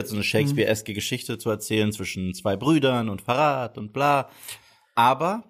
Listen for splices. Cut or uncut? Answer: uncut